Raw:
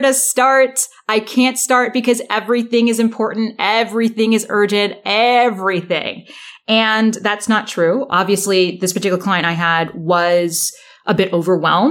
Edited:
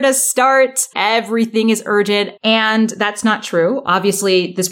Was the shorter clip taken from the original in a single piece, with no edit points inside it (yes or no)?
no